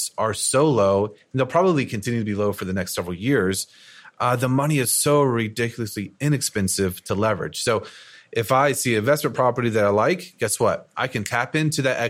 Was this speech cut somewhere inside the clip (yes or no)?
no